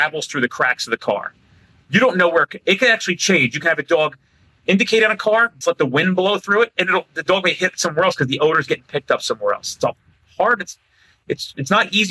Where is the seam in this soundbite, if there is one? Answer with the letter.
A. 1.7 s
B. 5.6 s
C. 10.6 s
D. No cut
B